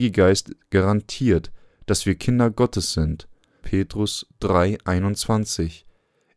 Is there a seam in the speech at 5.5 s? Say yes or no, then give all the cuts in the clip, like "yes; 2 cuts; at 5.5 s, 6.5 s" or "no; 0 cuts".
no; 1 cut; at 3.6 s